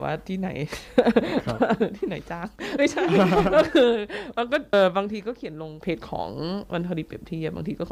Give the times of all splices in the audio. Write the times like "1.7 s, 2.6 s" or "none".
4.7 s